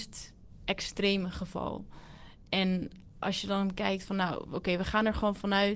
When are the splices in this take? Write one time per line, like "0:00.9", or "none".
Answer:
none